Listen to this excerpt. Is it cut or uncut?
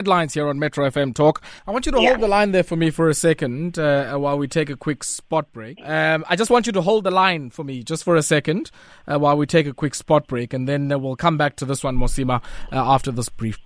cut